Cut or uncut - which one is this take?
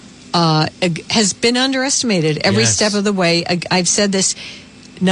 uncut